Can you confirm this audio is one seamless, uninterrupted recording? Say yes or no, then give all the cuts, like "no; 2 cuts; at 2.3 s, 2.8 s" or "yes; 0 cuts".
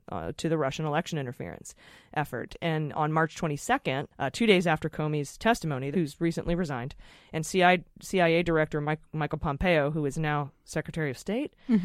no; 2 cuts; at 4.1 s, 5.9 s